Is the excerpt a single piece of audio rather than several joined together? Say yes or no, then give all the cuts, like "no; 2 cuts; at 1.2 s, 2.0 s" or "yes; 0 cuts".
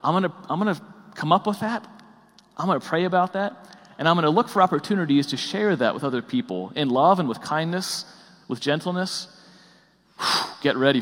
yes; 0 cuts